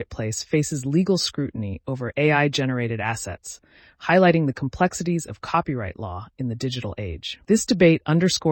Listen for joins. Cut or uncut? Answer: uncut